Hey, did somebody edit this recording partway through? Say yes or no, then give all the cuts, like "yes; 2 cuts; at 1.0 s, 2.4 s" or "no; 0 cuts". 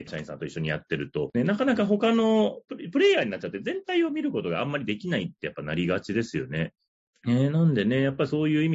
yes; 1 cut; at 7.1 s